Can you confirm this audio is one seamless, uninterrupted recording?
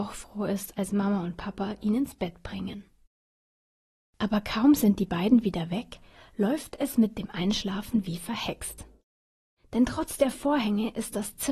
yes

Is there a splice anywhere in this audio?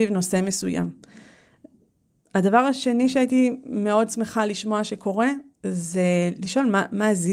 no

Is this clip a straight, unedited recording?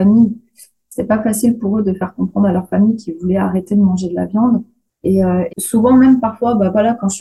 no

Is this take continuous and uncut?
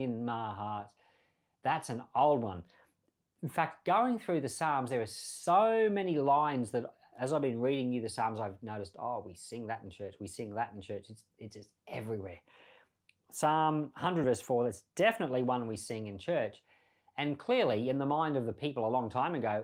yes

